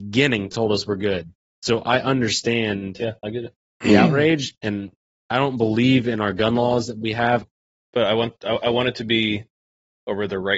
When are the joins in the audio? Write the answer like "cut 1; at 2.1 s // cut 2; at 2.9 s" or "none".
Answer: cut 1; at 1.5 s // cut 2; at 7.4 s